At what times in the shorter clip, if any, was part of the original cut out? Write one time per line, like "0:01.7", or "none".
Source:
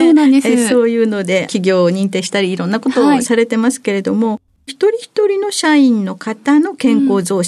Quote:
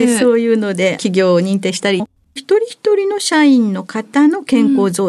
0:02.0